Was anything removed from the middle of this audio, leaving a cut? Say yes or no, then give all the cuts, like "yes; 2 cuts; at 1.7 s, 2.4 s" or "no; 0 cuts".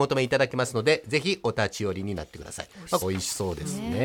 yes; 1 cut; at 3.0 s